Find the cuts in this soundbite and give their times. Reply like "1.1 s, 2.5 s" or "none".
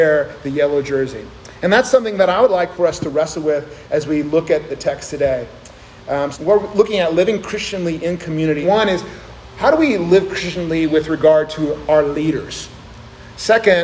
6.3 s, 8.6 s